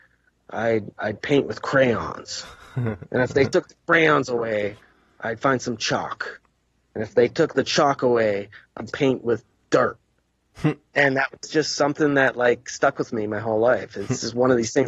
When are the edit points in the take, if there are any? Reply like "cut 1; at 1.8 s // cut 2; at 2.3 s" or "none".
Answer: cut 1; at 8.9 s